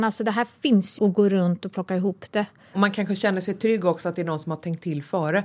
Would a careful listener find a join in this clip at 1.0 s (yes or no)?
yes